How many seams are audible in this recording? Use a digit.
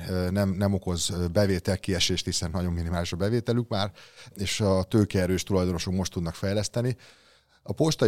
0